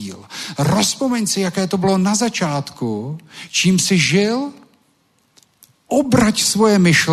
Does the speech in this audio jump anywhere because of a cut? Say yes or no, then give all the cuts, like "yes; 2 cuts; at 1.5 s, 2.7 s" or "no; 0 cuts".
no; 0 cuts